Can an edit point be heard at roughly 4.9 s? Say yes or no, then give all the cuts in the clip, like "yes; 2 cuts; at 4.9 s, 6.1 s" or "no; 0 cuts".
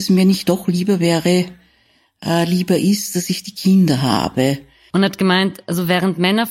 yes; 1 cut; at 4.9 s